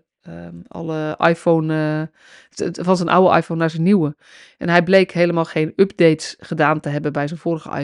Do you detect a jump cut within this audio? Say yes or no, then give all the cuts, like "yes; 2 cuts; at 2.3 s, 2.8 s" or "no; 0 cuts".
no; 0 cuts